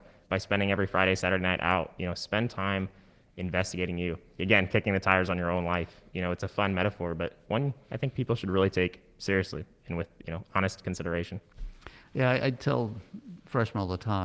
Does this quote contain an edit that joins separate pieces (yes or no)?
no